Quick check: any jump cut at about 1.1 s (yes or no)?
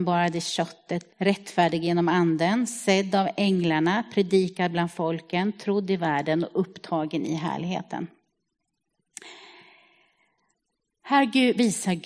yes